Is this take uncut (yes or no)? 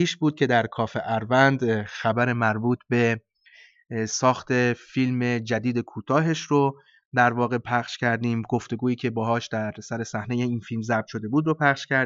yes